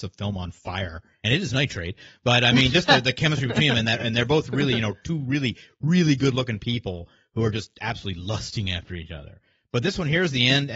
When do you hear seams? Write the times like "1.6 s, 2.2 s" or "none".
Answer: none